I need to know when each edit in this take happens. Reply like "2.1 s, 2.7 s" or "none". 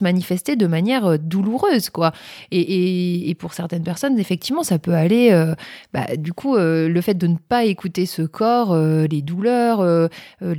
none